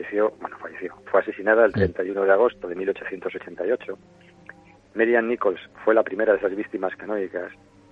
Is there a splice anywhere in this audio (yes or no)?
yes